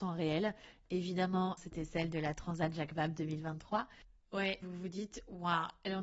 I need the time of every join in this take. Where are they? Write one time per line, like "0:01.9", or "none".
0:01.6
0:04.6